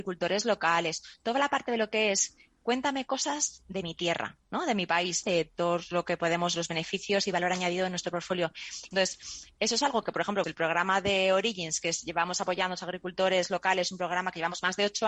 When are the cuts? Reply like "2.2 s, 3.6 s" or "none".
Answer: 5.2 s, 8.9 s, 10.4 s